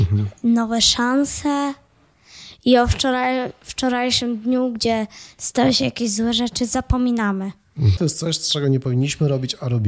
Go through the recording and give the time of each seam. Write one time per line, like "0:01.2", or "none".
0:08.0